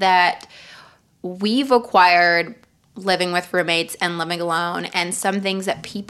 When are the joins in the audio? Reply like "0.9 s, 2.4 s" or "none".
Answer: none